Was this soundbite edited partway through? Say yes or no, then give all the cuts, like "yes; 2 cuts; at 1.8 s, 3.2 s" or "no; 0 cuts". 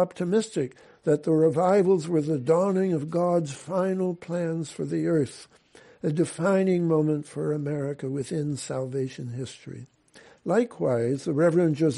no; 0 cuts